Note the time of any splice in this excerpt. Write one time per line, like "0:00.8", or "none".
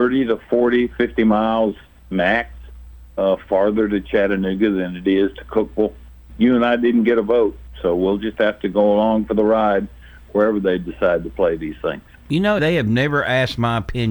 0:06.3
0:12.6